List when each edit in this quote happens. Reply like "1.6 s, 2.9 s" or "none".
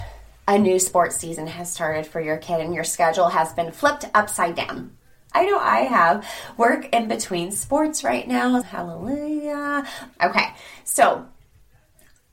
5.3 s, 8.6 s, 10.1 s